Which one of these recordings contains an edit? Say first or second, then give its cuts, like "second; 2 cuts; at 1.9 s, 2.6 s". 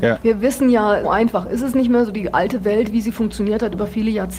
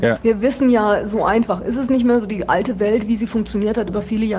first; 1 cut; at 1.0 s